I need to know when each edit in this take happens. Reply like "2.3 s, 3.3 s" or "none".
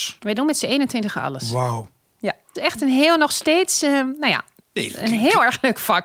2.6 s

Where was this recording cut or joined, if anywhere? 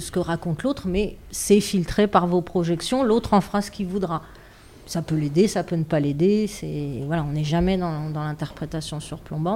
none

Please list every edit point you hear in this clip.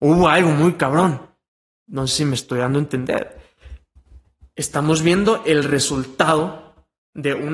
1.8 s

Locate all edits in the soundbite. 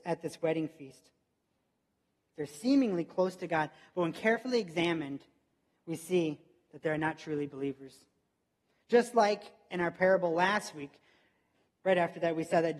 11.7 s

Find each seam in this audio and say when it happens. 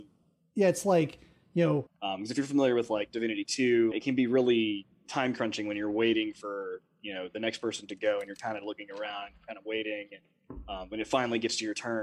1.9 s, 3.9 s

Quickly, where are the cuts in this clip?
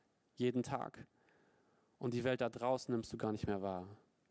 none

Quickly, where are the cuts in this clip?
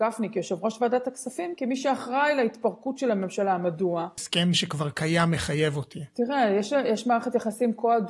4.2 s

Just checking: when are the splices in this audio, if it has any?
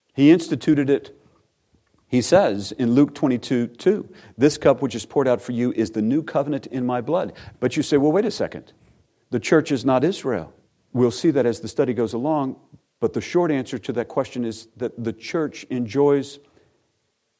7.5 s, 10.8 s

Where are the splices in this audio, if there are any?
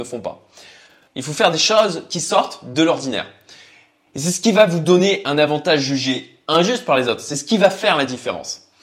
1.1 s

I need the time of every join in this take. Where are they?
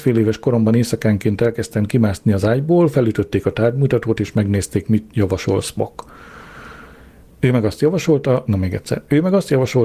8.5 s

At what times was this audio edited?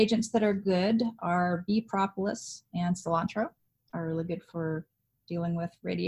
none

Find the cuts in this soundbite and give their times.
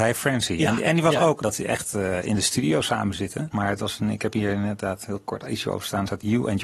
1.4 s, 3.5 s

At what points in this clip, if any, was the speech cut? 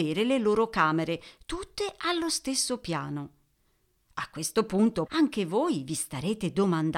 5.1 s

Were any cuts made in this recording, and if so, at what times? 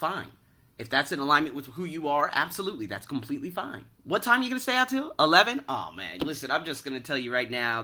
4.0 s

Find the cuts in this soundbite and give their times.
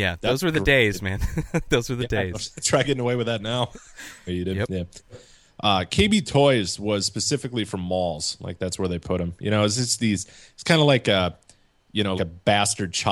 4.3 s, 12.2 s

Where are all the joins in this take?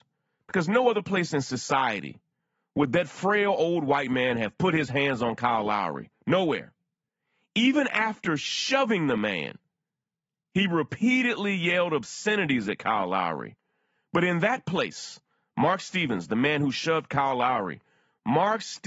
none

